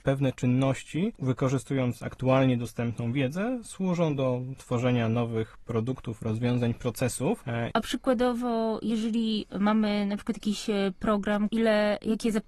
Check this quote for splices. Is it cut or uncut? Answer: cut